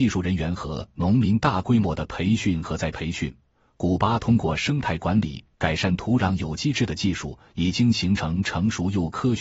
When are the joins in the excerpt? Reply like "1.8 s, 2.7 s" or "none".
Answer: none